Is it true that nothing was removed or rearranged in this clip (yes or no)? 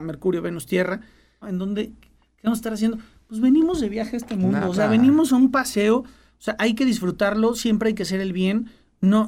no